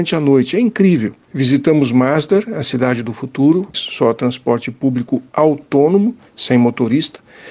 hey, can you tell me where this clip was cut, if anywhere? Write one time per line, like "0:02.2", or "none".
0:01.3
0:03.7